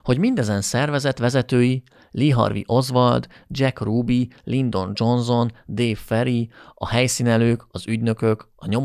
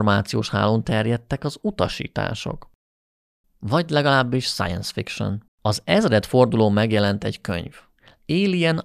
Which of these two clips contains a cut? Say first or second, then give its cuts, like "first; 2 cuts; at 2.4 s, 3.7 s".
second; 2 cuts; at 3.4 s, 5.5 s